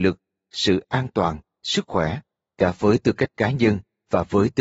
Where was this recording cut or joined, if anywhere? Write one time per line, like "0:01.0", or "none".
none